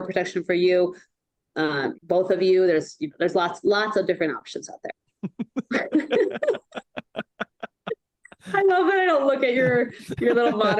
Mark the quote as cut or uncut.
cut